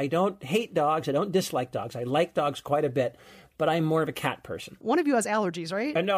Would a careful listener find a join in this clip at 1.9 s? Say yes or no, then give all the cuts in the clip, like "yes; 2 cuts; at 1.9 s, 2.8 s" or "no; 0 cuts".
no; 1 cut; at 4.8 s